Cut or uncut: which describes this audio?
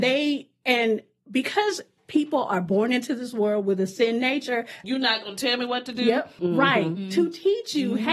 cut